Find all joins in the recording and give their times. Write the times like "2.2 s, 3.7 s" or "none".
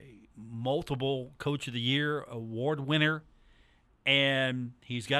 none